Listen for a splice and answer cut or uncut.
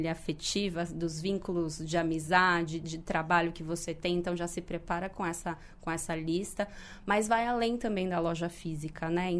uncut